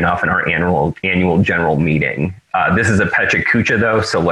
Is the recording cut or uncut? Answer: uncut